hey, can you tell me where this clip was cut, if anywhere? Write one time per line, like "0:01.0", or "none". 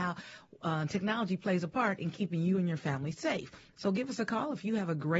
0:03.7